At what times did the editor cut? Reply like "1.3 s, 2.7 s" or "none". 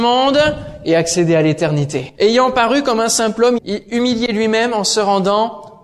2.2 s, 3.6 s

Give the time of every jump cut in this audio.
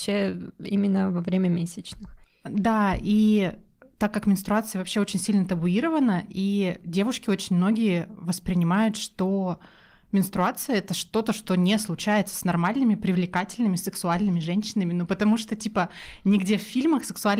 none

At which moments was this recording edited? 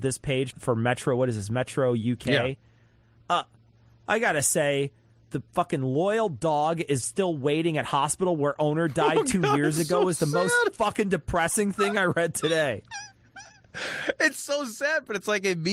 none

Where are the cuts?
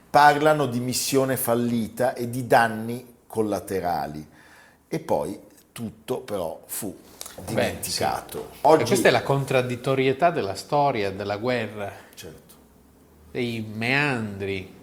none

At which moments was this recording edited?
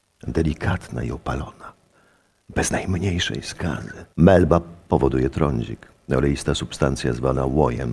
4.1 s

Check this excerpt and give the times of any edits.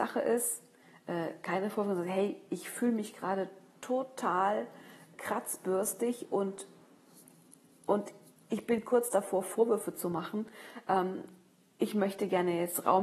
5.1 s

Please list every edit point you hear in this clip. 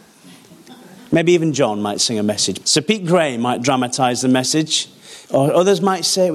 2.6 s, 5.3 s

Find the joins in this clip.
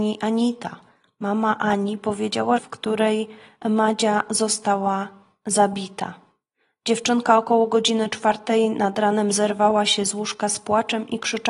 2.6 s

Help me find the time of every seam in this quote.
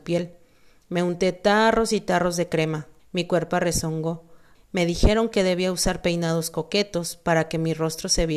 3.0 s, 4.5 s

